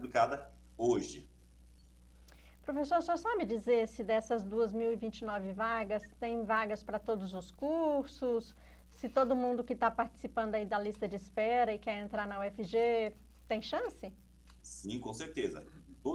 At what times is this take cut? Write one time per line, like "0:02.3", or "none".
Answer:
0:14.6